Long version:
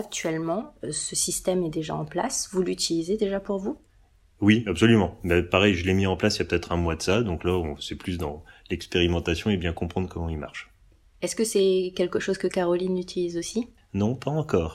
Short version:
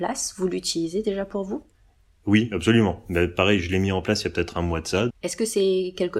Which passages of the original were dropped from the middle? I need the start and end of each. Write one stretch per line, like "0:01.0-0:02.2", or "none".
0:07.2-0:11.1